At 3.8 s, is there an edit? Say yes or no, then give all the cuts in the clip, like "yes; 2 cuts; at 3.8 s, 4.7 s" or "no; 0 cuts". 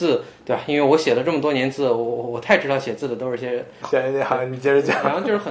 yes; 1 cut; at 3.8 s